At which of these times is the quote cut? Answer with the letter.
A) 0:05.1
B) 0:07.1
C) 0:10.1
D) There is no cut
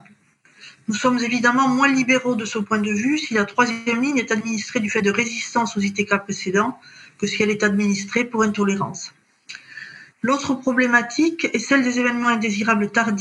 C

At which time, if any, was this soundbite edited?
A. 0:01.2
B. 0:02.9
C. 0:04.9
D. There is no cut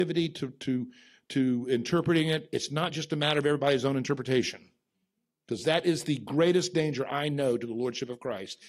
D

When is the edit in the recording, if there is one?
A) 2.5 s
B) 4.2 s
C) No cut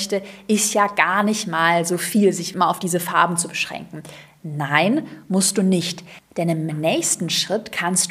A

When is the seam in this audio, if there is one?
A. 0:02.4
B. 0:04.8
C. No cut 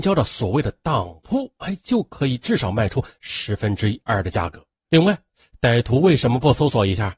B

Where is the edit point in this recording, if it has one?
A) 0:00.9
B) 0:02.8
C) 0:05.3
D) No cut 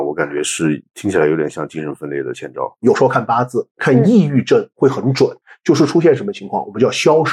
B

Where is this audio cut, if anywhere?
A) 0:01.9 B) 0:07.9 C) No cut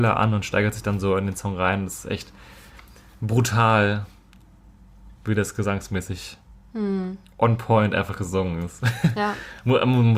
C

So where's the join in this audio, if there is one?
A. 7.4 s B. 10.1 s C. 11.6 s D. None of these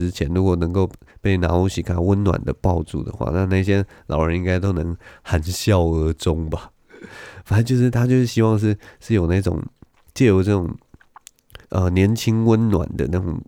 C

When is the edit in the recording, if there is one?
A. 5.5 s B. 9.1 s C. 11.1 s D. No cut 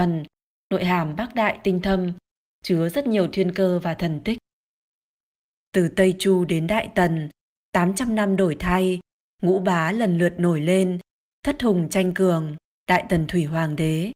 A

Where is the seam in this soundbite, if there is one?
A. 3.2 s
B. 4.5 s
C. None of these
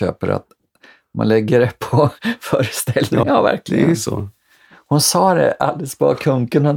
A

